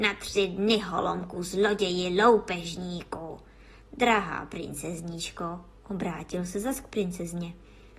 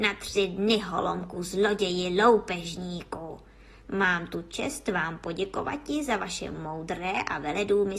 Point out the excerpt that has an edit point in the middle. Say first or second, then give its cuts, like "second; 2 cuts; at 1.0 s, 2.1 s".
second; 1 cut; at 3.8 s